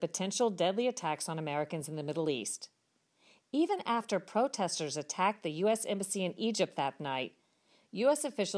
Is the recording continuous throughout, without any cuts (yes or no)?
yes